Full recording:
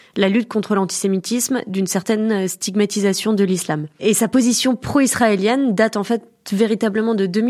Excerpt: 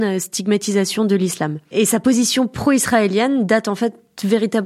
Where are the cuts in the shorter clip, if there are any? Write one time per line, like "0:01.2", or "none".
none